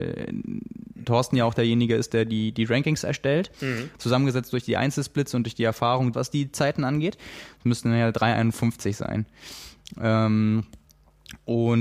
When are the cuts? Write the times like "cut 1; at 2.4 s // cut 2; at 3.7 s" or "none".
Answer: cut 1; at 3.9 s // cut 2; at 6.1 s // cut 3; at 7.5 s